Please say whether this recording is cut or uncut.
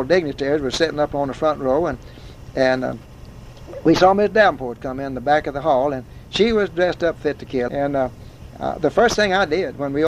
cut